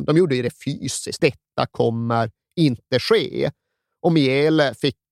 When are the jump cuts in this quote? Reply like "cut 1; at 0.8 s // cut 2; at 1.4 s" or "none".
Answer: cut 1; at 1.2 s